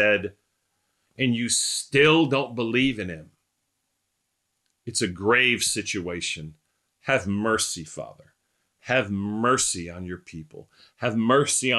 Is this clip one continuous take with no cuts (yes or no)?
yes